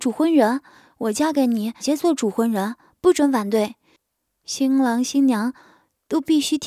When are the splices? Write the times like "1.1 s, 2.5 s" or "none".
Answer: 1.8 s